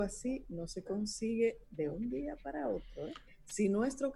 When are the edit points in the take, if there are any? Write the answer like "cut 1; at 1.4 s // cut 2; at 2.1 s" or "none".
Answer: cut 1; at 3.3 s